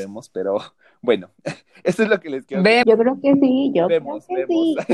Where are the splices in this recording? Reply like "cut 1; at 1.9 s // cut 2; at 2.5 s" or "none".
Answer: cut 1; at 2.8 s